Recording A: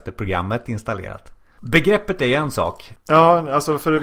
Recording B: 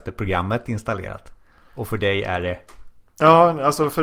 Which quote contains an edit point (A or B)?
A